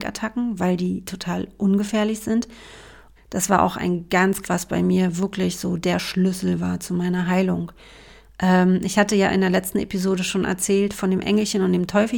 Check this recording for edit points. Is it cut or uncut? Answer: cut